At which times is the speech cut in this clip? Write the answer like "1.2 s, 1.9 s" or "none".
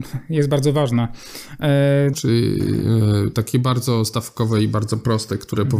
2.1 s